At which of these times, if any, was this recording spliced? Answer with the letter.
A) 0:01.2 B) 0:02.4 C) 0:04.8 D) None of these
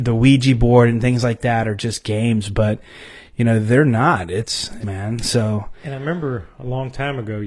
C